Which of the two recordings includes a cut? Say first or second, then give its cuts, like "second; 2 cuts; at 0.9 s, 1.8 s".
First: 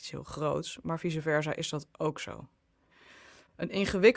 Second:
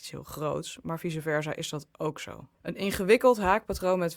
second; 1 cut; at 2.5 s